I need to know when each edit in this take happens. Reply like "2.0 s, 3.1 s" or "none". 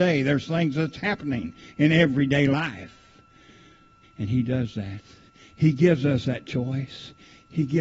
4.0 s